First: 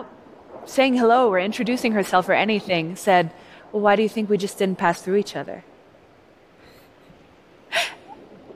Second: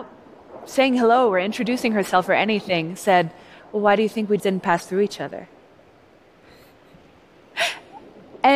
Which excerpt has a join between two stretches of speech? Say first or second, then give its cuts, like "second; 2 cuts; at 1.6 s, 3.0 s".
second; 1 cut; at 4.4 s